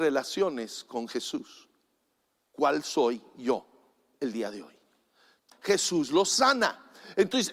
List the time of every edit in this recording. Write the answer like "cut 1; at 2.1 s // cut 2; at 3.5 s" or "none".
cut 1; at 5.5 s